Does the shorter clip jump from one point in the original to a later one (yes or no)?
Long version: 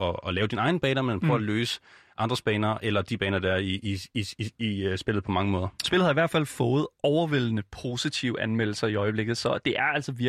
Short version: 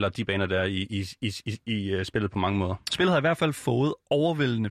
no